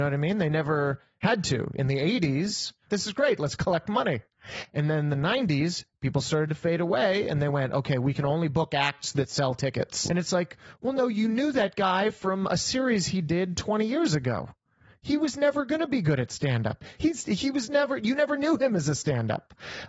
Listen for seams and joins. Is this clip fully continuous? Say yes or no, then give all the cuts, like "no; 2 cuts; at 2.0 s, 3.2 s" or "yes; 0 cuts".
no; 3 cuts; at 2.9 s, 10.1 s, 17.0 s